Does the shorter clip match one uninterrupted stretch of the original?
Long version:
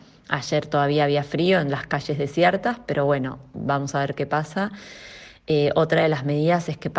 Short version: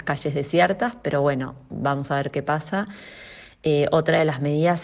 yes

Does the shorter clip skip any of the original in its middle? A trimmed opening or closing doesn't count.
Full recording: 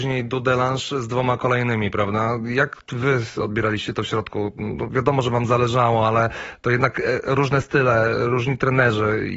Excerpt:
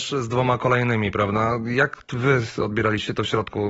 no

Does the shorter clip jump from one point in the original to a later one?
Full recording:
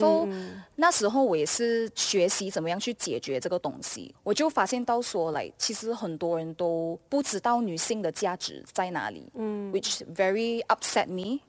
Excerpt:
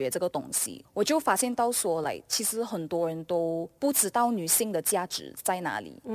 no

